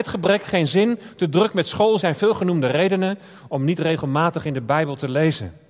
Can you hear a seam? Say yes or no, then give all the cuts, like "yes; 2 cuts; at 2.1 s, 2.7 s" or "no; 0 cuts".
yes; 1 cut; at 2.0 s